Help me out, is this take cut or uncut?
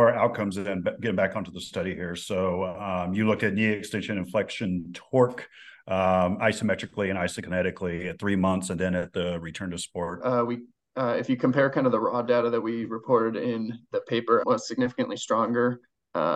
cut